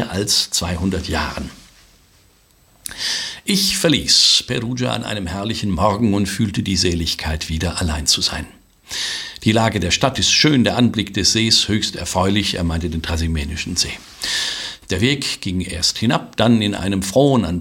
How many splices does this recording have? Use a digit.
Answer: 1